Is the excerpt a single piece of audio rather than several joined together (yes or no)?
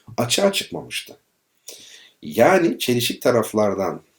yes